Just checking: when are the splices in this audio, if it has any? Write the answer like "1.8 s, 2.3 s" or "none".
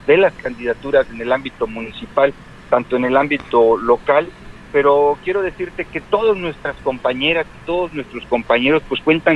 none